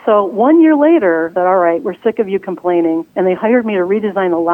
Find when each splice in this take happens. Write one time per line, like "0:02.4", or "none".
0:01.4
0:03.1